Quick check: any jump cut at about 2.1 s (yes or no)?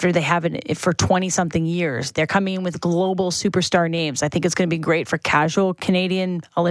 no